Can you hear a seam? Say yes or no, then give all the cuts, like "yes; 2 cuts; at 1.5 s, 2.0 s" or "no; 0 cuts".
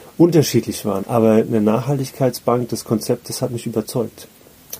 no; 0 cuts